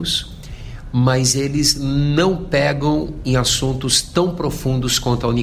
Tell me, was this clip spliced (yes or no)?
no